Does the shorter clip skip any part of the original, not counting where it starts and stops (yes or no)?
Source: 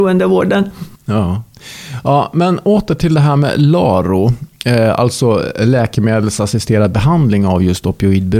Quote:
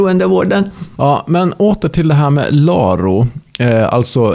yes